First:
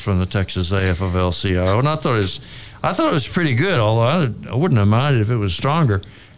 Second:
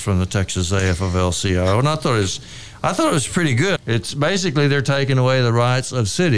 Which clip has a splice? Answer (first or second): second